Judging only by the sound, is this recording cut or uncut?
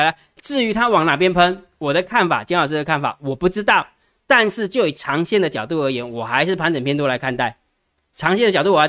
uncut